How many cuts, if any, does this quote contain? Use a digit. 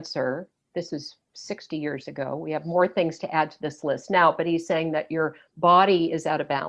0